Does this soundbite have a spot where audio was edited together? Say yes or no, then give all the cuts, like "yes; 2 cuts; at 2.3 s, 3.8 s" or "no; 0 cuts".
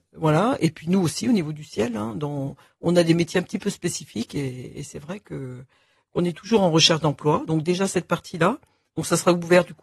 no; 0 cuts